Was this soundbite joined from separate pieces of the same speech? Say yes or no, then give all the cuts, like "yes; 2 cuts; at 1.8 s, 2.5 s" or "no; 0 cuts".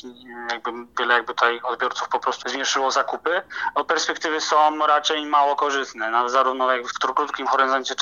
yes; 2 cuts; at 0.9 s, 2.4 s